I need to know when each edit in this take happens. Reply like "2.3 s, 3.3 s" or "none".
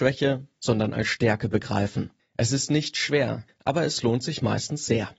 2.2 s, 3.5 s